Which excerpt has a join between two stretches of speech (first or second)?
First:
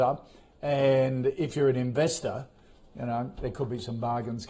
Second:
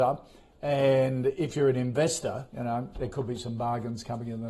second